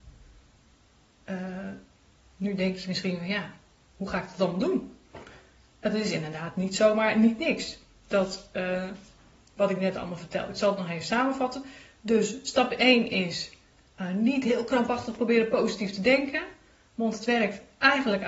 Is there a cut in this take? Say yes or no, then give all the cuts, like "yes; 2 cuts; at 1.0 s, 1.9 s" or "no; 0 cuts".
no; 0 cuts